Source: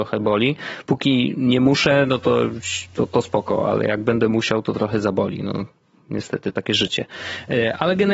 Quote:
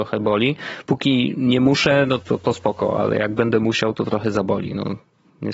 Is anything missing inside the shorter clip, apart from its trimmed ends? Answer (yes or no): yes